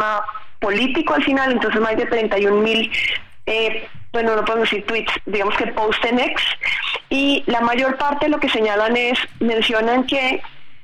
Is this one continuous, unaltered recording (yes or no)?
no